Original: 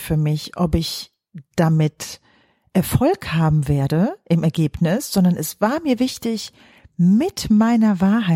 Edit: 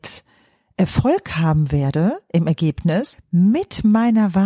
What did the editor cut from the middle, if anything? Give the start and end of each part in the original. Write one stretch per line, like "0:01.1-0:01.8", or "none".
0:05.1-0:06.8